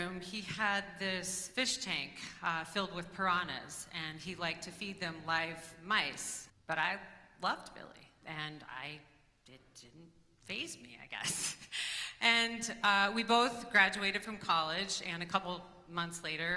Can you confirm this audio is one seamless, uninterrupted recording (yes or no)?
no